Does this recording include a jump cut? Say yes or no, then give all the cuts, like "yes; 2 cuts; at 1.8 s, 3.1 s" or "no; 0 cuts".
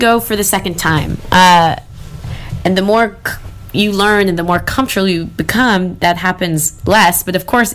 no; 0 cuts